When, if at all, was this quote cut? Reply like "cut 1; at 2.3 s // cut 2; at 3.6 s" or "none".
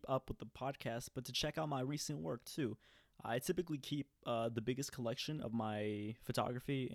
none